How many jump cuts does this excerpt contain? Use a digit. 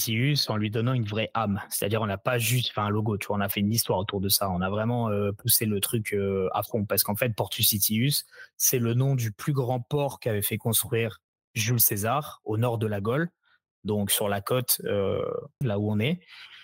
1